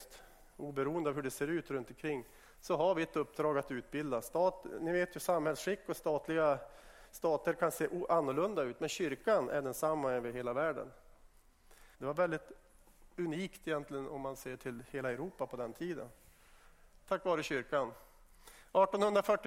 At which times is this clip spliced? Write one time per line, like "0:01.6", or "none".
0:11.9